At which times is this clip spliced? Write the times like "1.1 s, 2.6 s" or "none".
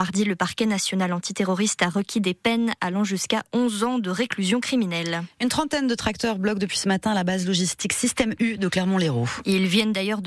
none